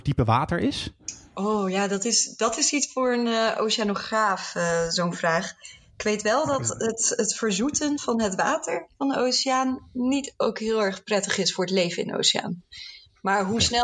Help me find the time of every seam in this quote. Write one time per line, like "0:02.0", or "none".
none